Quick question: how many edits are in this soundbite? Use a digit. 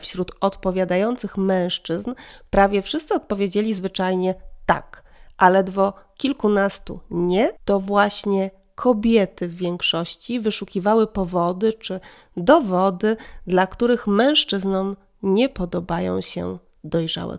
1